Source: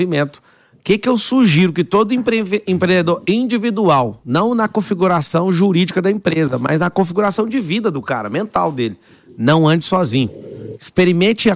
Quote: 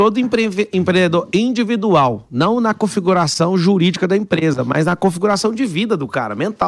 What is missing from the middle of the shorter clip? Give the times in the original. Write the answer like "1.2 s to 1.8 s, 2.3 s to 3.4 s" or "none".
none